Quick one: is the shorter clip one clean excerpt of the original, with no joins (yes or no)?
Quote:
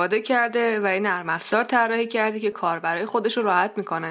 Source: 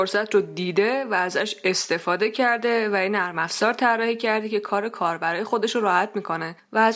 no